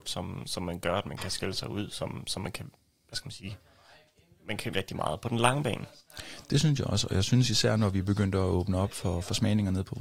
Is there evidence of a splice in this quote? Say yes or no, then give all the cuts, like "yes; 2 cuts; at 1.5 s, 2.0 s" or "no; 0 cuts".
yes; 1 cut; at 4.7 s